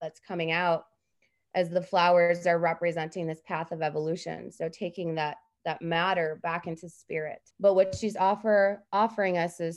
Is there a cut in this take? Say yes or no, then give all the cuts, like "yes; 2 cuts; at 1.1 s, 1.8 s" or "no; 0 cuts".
yes; 1 cut; at 7.5 s